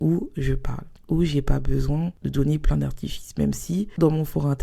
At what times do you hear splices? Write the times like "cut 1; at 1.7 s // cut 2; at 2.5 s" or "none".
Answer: none